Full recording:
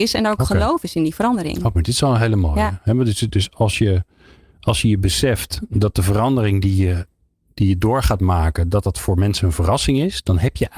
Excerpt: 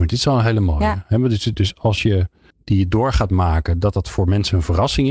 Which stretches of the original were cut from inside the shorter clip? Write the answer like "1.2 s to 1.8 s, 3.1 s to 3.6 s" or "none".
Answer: 4.3 s to 7.4 s